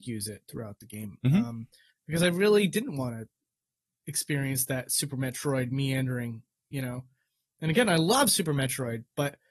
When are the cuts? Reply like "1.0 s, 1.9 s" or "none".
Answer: none

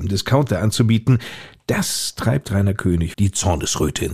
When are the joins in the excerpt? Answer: 3.1 s

